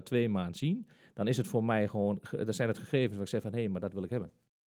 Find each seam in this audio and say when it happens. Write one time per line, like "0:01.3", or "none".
none